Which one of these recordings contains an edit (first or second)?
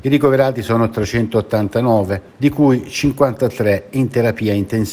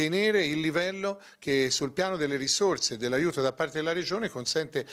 first